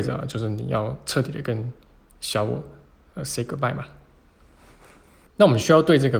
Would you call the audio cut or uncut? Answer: cut